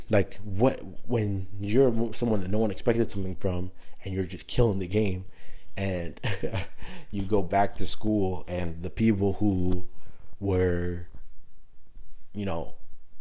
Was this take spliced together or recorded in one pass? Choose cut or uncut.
uncut